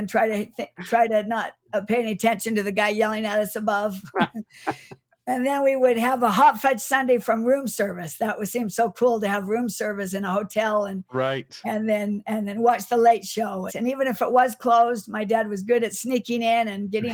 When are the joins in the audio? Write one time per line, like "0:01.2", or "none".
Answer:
0:13.7